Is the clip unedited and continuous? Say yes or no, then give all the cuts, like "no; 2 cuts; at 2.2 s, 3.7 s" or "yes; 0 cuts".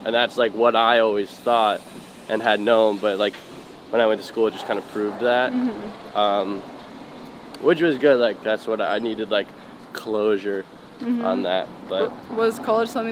yes; 0 cuts